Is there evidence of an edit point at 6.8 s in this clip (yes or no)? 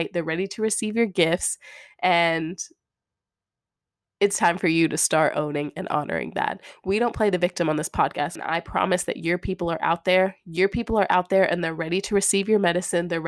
no